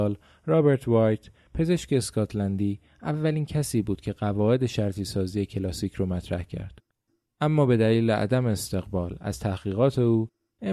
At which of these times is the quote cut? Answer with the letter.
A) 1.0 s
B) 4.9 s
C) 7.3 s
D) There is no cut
D